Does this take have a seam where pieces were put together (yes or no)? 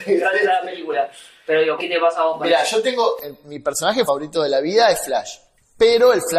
yes